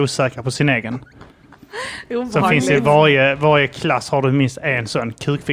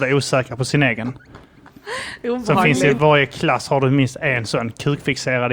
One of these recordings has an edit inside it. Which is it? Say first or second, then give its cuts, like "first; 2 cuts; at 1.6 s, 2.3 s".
second; 1 cut; at 3.0 s